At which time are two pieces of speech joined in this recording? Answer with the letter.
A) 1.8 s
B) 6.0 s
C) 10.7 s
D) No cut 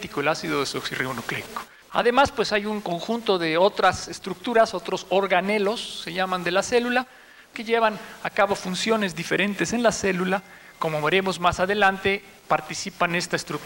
A